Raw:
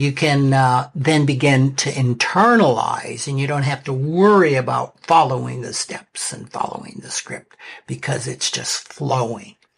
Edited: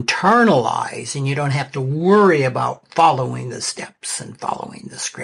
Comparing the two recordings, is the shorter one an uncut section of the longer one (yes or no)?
yes